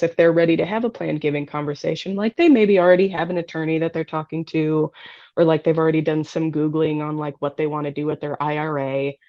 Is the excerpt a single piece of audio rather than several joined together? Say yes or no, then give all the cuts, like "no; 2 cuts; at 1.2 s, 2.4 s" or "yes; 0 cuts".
yes; 0 cuts